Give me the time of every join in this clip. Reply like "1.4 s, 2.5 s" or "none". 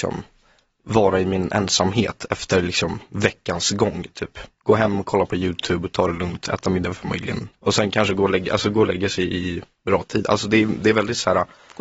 none